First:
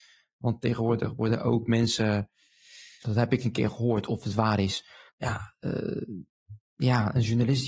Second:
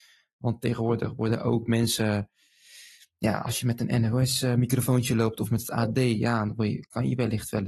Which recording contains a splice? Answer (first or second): first